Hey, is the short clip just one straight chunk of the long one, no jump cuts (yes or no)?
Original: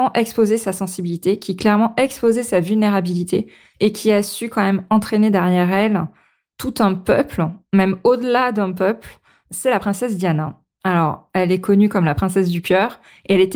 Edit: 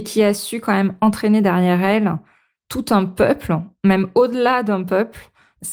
yes